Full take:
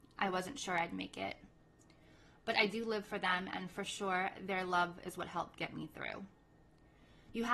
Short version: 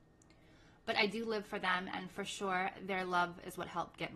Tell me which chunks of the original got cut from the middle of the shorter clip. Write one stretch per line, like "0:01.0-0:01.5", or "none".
none